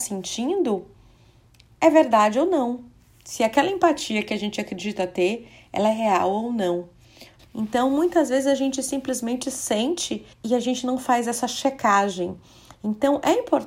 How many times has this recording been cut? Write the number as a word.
two